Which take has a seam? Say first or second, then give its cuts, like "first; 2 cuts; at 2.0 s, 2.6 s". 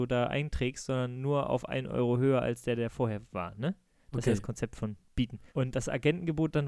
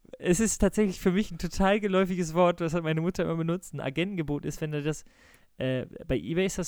first; 1 cut; at 5.5 s